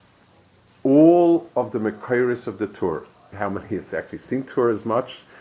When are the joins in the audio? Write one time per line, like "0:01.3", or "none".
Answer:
0:03.3